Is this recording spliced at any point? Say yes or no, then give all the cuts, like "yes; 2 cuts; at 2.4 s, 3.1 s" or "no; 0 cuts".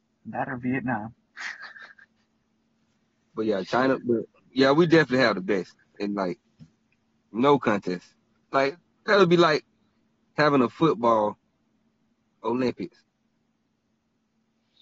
no; 0 cuts